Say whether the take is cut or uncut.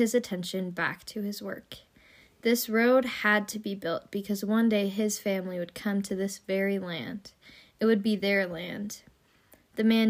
uncut